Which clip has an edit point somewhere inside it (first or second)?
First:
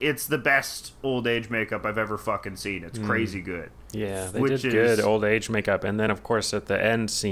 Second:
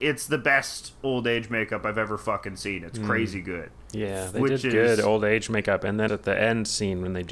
second